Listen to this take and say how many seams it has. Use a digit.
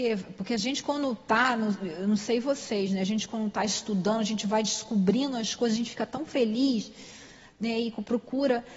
0